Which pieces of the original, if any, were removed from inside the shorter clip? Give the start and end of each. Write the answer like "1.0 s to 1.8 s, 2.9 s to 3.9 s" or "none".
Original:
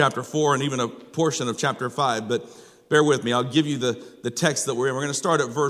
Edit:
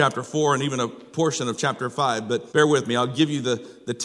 2.5 s to 2.9 s